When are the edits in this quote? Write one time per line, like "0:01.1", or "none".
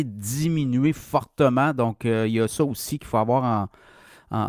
none

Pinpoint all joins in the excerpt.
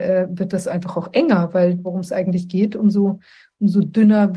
0:01.8

